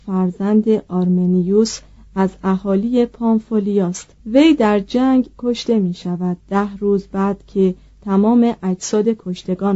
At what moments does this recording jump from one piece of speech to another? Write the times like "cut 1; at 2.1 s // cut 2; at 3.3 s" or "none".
cut 1; at 4.2 s // cut 2; at 6.4 s